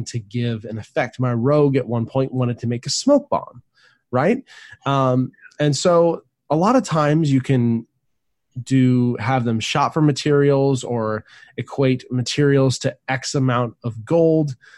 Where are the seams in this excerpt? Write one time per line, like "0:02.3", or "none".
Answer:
none